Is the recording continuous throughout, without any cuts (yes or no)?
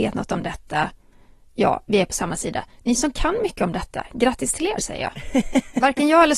yes